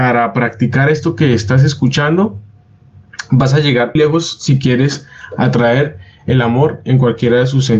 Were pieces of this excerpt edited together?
yes; 1 cut; at 4.0 s

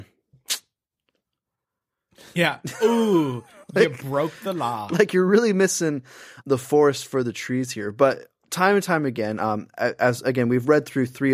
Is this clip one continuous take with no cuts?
no; 2 cuts; at 2.3 s, 6.4 s

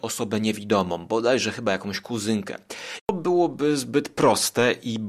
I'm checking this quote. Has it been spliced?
yes; 1 cut; at 3.0 s

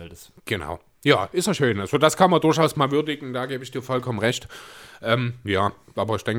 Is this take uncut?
yes; 0 cuts

